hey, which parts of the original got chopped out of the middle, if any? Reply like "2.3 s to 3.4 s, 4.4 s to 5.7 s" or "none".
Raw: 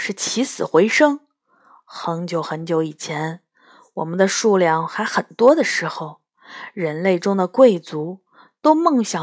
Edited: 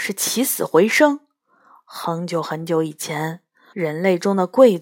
3.7 s to 6.7 s